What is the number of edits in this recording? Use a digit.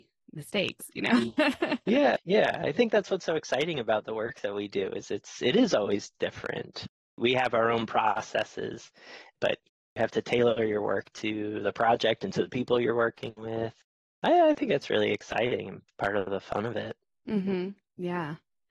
0